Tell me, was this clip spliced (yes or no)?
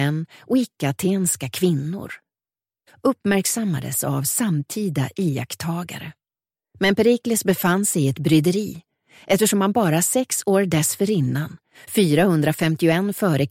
yes